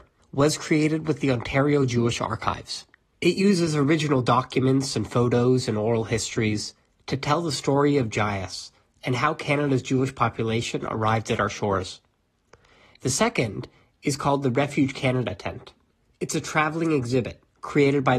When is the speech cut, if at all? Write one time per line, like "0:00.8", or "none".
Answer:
none